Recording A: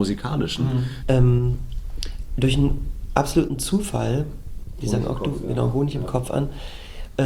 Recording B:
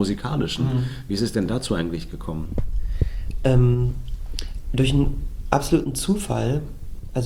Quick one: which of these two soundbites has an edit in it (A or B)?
A